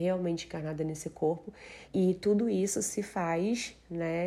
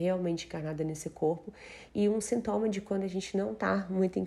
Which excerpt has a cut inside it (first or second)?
first